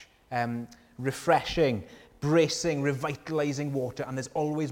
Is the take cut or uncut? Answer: uncut